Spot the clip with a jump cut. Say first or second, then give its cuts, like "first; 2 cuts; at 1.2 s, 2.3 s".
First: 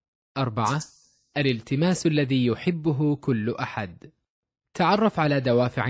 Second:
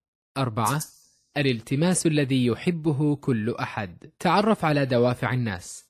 second; 1 cut; at 4.1 s